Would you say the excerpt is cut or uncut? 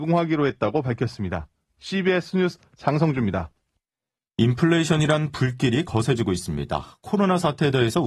uncut